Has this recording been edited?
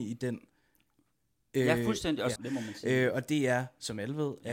yes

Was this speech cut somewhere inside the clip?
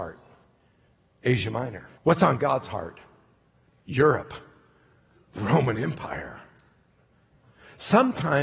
yes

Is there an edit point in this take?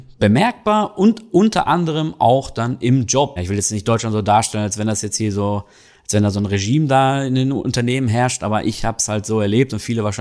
yes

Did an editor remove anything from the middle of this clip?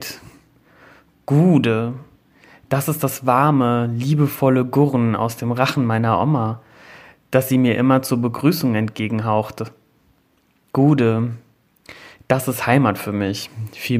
no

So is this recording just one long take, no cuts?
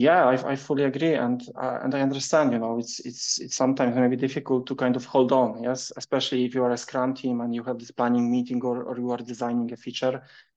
yes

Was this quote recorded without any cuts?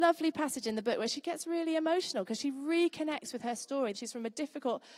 no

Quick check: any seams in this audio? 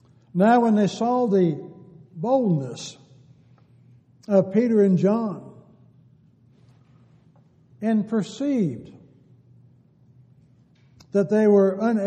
no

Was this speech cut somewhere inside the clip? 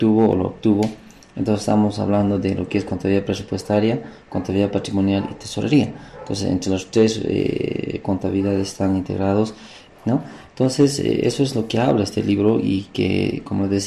yes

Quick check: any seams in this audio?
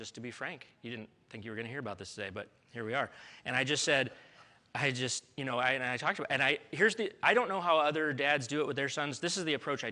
no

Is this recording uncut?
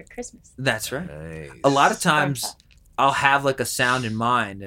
yes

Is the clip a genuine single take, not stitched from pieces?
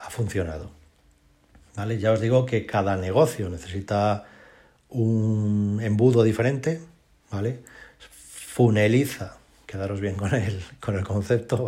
yes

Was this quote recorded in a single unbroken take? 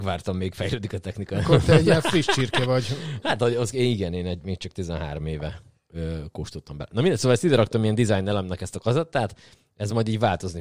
yes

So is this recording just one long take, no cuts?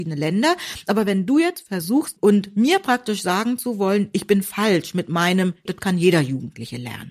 no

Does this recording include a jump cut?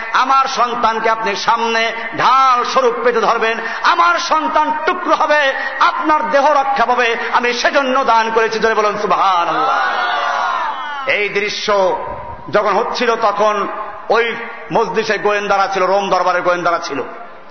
yes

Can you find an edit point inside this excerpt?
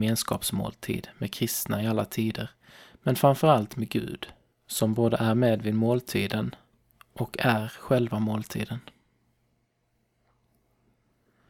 no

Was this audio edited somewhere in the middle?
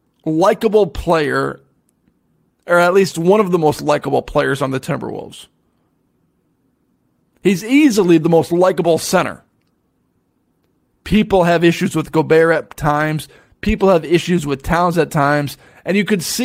no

